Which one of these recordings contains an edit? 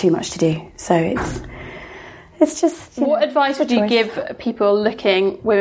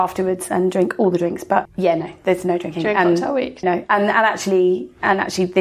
second; 2 cuts; at 1.7 s, 3.6 s

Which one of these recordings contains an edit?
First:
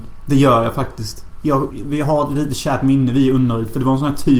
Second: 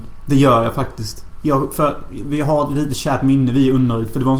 first; 1 cut; at 1.7 s

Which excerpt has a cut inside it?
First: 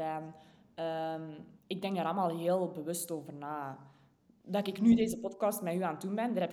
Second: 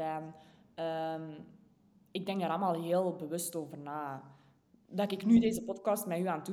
first; 1 cut; at 1.6 s

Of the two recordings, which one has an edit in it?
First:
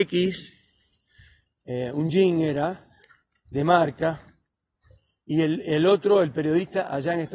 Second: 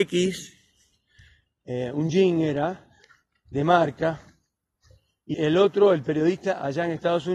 second; 1 cut; at 5.3 s

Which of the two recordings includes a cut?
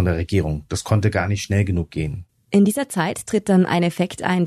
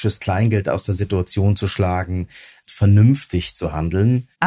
second; 1 cut; at 2.7 s

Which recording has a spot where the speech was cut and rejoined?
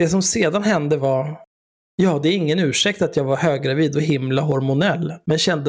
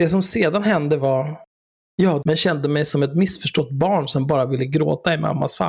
second; 1 cut; at 2.2 s

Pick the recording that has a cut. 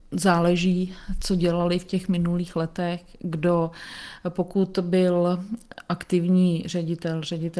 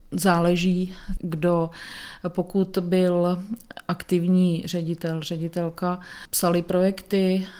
second; 1 cut; at 1.2 s

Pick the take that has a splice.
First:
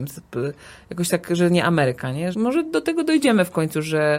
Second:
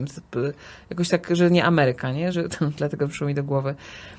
first; 1 cut; at 2.3 s

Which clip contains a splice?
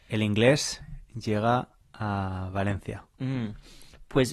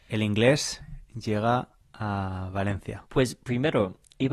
second; 1 cut; at 3.1 s

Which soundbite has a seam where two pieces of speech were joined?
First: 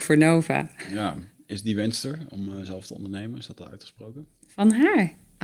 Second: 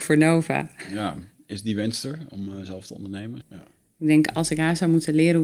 second; 1 cut; at 3.4 s

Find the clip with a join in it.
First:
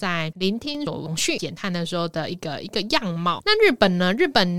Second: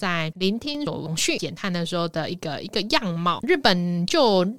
second; 1 cut; at 3.4 s

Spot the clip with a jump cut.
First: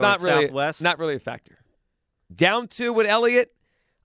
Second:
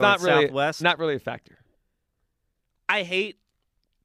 first; 1 cut; at 2.3 s

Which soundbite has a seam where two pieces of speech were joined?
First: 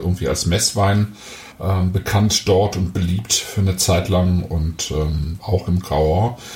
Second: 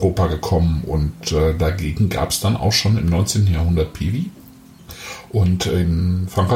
first; 2 cuts; at 1.5 s, 5.4 s

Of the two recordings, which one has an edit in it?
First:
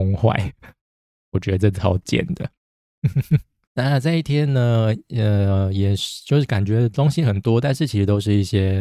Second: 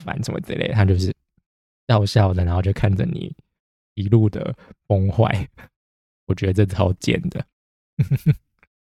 first; 1 cut; at 3.7 s

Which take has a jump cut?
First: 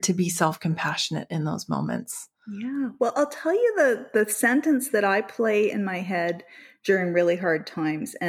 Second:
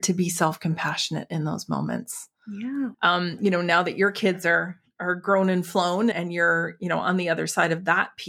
second; 2 cuts; at 2.9 s, 6.1 s

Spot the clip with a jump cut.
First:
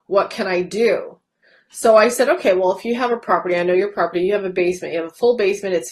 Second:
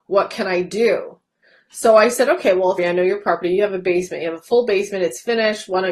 second; 1 cut; at 2.8 s

